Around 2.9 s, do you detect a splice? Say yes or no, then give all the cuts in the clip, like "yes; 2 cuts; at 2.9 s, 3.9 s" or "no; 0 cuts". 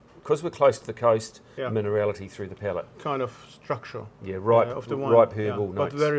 yes; 2 cuts; at 1.6 s, 2.9 s